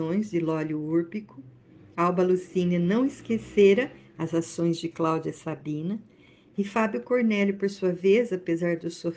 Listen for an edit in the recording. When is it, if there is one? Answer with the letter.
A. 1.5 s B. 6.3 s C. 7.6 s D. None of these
D